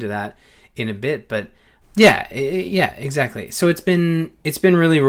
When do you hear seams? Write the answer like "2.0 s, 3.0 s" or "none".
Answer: 1.8 s